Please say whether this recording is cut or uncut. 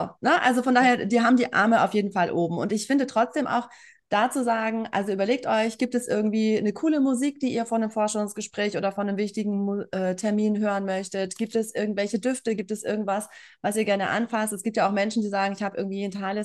uncut